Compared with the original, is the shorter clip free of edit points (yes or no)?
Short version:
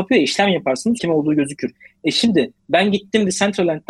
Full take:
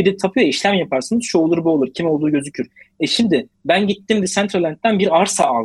no